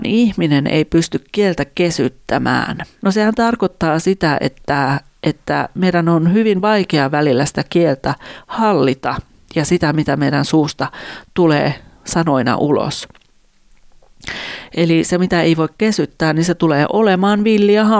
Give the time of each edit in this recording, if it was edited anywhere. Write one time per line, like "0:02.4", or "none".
0:03.0